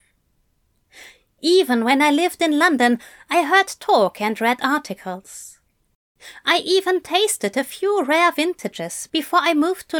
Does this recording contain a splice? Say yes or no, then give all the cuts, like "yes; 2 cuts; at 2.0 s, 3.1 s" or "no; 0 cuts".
no; 0 cuts